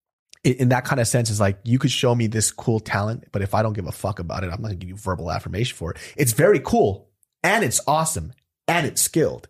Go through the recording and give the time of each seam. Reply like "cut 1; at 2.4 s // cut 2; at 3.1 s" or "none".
none